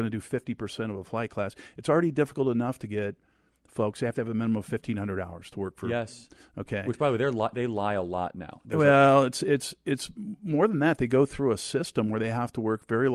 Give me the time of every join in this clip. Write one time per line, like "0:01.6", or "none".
none